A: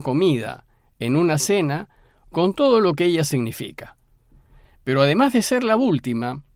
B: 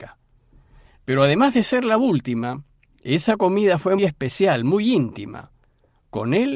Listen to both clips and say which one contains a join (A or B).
B